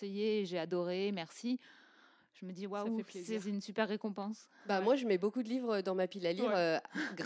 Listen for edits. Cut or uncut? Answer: uncut